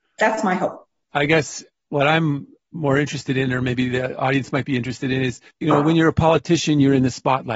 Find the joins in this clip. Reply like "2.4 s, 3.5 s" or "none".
1.1 s, 5.5 s